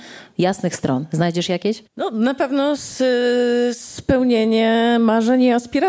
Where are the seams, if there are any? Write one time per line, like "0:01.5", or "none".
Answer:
none